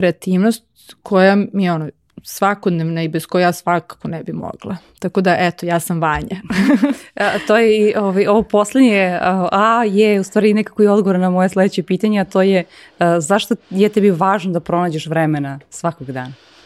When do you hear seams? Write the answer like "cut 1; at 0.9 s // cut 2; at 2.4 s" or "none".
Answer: none